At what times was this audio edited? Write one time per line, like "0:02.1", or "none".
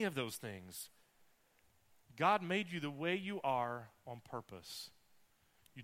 none